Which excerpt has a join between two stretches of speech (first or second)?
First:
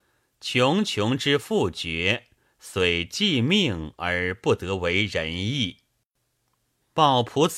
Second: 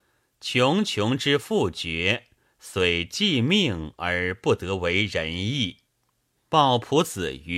second